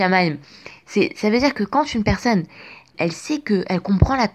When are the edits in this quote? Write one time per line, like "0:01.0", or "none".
0:02.9

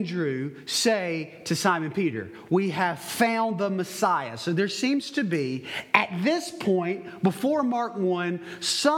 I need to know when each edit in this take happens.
none

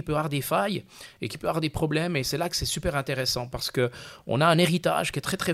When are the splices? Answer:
none

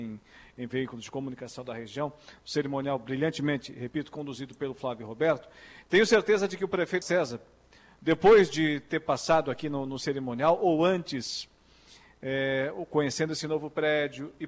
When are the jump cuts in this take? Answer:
0:07.0

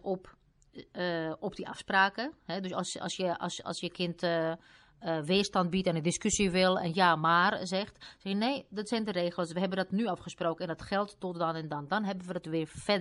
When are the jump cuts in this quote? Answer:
none

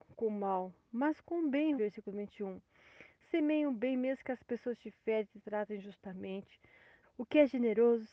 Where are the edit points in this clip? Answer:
0:01.8
0:07.0

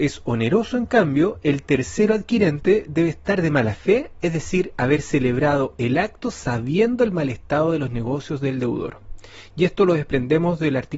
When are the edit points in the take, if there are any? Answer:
none

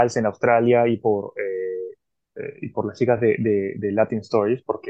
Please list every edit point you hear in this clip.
none

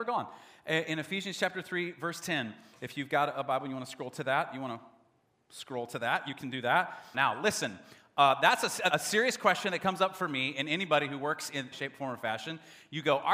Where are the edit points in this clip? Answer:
0:07.1
0:08.9
0:11.7

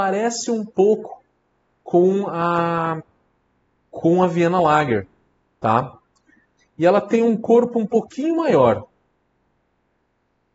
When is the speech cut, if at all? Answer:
0:06.6

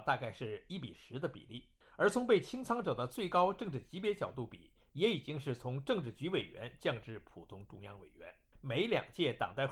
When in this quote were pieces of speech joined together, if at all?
0:08.5

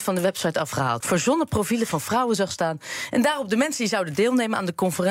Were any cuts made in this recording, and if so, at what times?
0:01.0

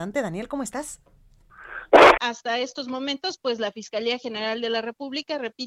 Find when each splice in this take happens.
0:02.2

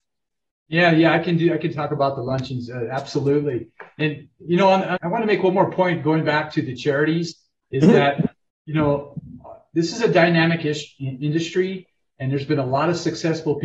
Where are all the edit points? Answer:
0:05.0

